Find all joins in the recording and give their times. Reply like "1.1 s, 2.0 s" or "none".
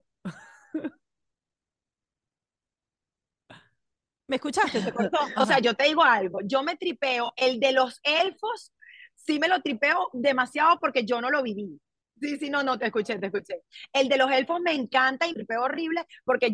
5.4 s